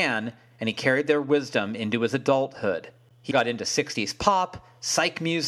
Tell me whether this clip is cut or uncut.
cut